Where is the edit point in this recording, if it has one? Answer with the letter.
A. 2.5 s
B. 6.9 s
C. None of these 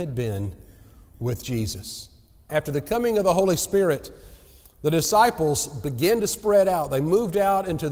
A